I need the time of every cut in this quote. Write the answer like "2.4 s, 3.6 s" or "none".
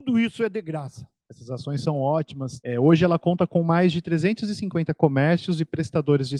2.6 s